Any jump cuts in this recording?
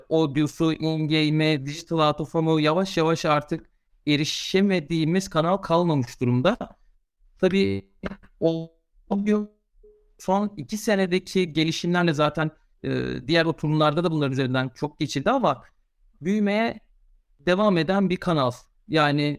no; 0 cuts

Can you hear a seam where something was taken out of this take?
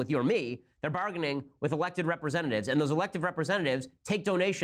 no; 0 cuts

